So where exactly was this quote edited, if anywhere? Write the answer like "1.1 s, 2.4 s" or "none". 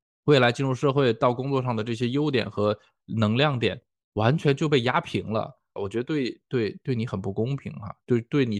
5.8 s, 6.8 s